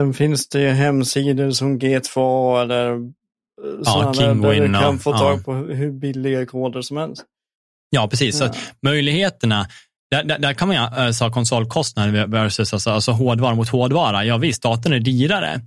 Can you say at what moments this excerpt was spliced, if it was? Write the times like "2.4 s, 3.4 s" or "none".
none